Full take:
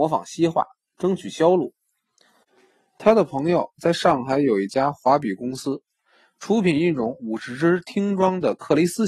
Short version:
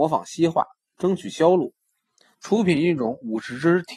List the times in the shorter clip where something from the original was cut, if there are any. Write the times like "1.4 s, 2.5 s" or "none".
2.3 s